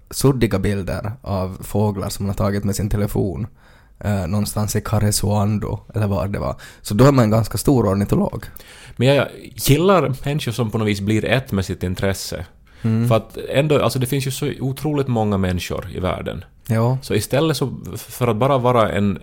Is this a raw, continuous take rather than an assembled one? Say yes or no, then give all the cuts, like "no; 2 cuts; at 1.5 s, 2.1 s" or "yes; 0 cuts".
yes; 0 cuts